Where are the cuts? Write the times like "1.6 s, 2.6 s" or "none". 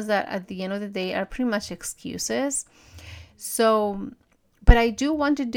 none